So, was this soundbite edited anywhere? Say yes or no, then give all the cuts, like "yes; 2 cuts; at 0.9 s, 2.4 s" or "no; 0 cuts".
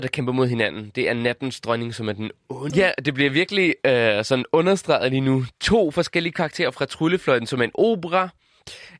yes; 1 cut; at 2.7 s